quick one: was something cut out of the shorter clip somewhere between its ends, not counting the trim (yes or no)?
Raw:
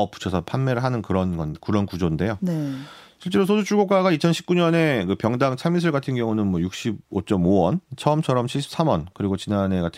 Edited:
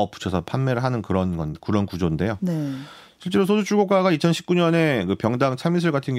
no